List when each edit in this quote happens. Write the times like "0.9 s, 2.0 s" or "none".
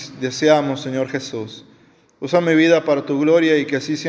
none